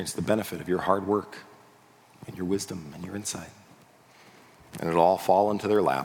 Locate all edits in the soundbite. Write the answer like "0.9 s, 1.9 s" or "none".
none